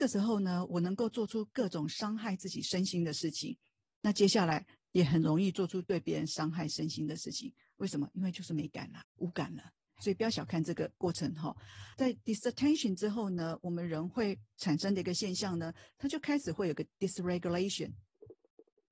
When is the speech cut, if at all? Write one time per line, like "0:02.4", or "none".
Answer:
0:09.0

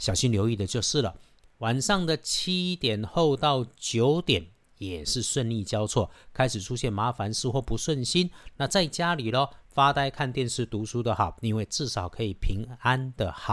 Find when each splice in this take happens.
none

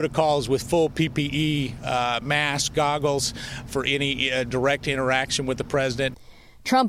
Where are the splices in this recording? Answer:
0:03.7

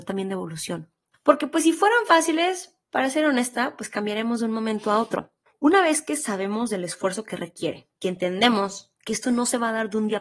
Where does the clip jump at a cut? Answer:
0:01.1
0:05.5
0:07.9

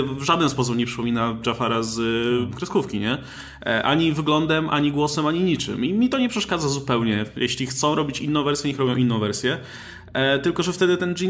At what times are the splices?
none

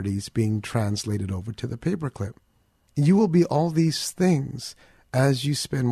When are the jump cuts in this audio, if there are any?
0:02.9

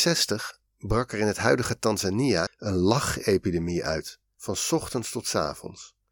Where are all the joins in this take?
0:02.5
0:04.4

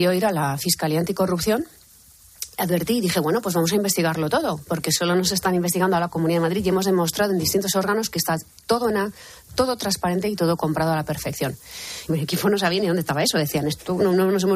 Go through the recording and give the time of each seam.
0:12.1

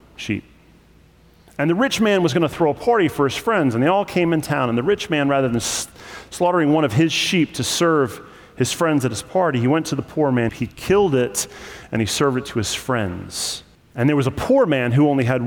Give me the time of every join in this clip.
0:10.5
0:13.8

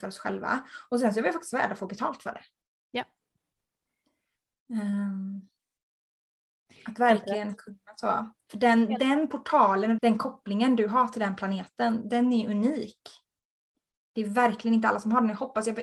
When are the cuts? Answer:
0:10.0

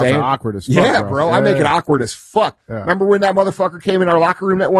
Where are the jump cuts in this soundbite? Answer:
none

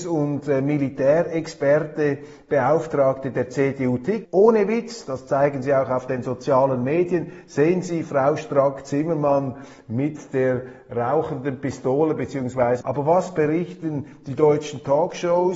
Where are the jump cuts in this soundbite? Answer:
0:04.2
0:12.8

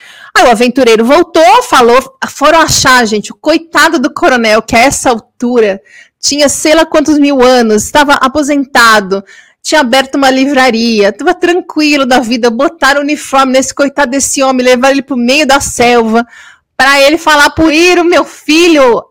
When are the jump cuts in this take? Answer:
0:17.7

